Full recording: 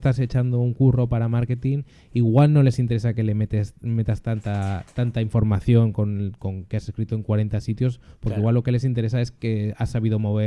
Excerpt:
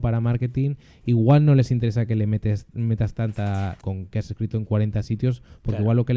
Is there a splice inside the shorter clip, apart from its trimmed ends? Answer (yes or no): yes